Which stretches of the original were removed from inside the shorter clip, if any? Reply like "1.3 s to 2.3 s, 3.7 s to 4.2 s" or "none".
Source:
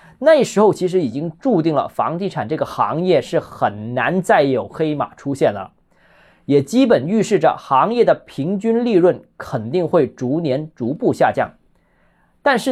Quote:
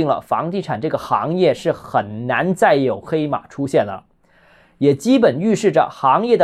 none